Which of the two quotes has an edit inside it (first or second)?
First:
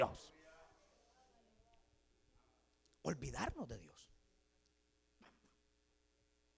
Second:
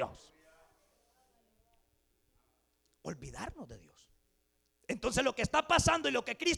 second